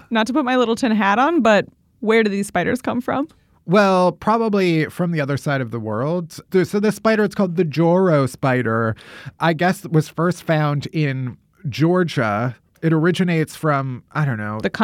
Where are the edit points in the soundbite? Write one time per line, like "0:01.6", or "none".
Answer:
none